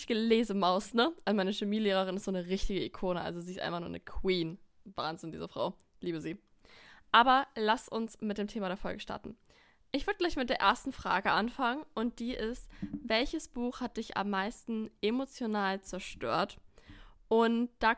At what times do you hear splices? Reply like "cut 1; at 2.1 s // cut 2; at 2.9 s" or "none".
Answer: none